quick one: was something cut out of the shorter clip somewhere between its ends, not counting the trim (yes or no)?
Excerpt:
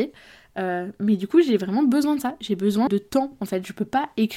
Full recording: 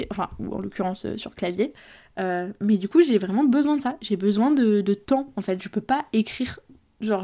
yes